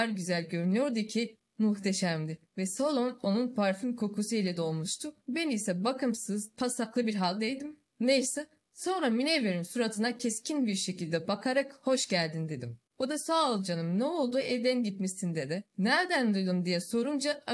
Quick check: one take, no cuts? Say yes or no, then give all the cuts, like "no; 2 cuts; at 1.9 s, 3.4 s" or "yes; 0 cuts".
no; 1 cut; at 5.2 s